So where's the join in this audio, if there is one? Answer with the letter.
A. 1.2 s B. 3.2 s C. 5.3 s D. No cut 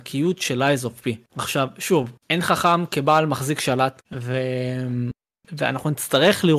D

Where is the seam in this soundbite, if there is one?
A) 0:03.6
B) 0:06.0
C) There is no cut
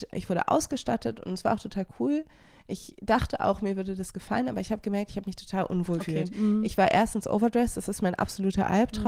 B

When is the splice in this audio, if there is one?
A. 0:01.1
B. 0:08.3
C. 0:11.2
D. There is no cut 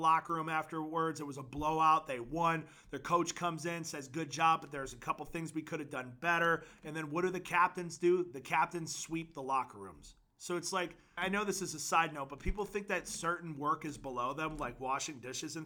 C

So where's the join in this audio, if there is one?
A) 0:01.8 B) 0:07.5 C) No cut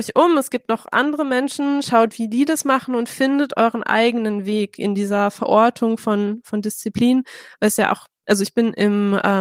C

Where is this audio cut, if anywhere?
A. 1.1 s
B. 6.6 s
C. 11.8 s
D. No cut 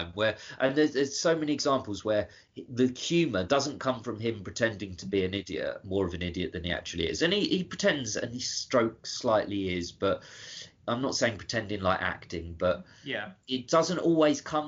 D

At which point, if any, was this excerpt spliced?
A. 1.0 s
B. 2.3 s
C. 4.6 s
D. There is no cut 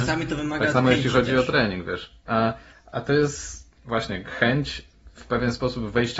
B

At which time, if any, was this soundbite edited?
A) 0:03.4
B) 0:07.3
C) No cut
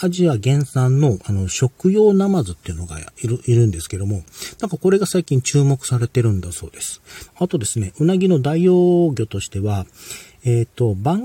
B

